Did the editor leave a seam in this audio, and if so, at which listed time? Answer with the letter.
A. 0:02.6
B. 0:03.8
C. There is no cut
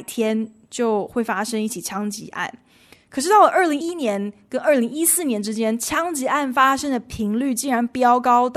B